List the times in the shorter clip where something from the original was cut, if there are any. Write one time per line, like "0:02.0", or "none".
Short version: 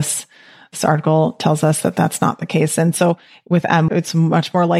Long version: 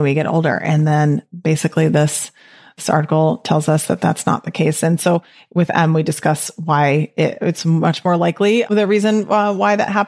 0:03.9